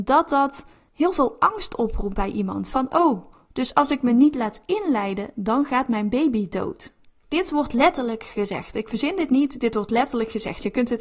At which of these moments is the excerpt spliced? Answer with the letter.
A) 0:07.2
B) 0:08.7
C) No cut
A